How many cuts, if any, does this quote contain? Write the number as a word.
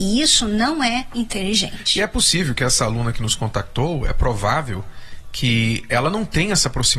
zero